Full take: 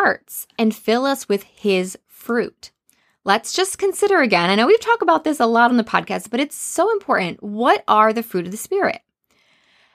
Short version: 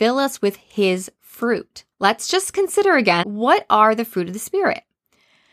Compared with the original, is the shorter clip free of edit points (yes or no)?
no